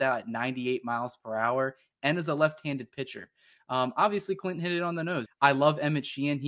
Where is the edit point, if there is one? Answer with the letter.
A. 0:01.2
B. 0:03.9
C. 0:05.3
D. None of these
C